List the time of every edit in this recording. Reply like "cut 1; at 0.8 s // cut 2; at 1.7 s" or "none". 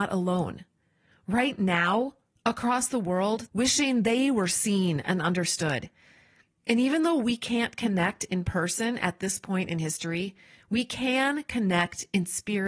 cut 1; at 3.5 s